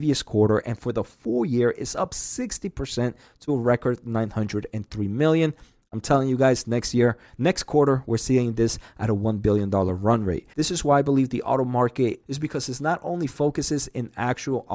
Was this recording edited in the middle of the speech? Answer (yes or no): yes